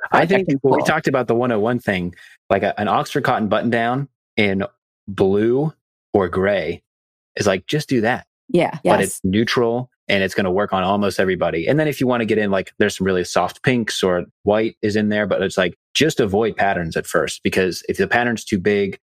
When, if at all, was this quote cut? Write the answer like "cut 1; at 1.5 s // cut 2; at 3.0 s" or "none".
cut 1; at 8.8 s